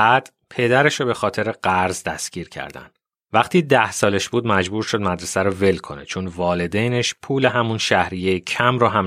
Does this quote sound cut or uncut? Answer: cut